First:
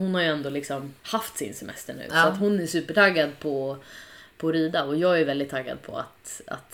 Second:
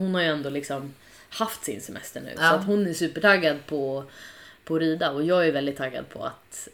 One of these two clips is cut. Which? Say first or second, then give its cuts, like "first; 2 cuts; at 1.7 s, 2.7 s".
first; 1 cut; at 1.0 s